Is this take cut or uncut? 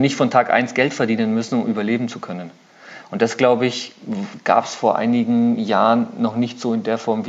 uncut